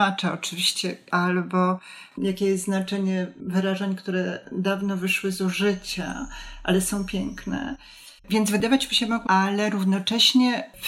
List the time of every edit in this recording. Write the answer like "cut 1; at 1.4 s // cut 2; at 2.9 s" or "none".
cut 1; at 1.1 s // cut 2; at 8.2 s // cut 3; at 9.3 s